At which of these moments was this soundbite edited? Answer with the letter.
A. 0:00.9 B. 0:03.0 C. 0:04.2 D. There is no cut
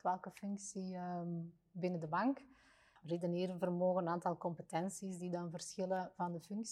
B